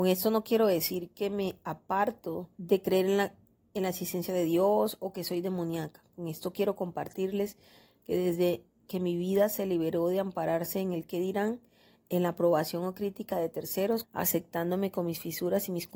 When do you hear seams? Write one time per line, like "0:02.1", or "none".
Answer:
0:02.5
0:14.0